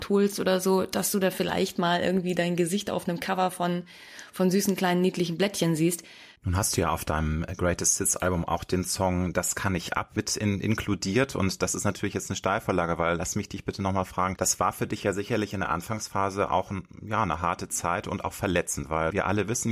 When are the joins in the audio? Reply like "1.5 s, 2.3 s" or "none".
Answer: 6.4 s

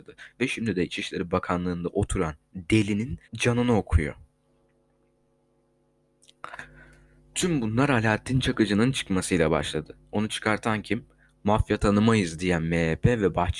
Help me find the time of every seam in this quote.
3.2 s

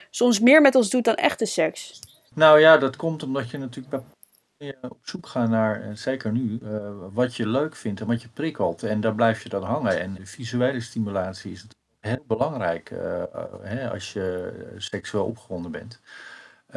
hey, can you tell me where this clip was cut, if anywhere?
10.2 s

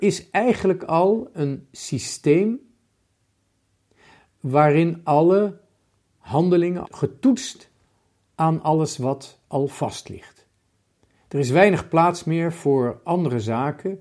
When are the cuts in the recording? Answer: 6.8 s

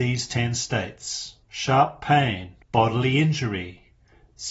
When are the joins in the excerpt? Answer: 1.4 s, 2.6 s

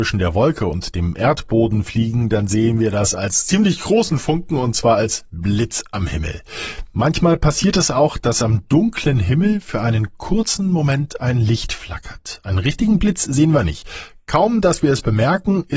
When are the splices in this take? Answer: none

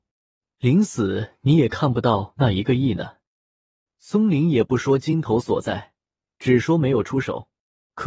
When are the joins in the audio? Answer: none

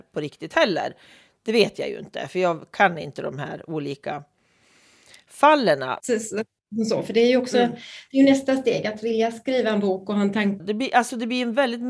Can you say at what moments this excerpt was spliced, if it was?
6.0 s, 10.6 s

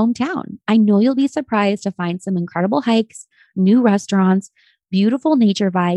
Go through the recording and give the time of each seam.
none

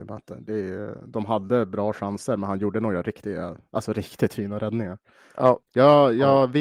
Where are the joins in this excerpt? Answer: 5.6 s

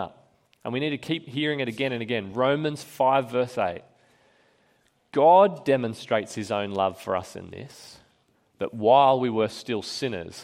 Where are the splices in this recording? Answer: none

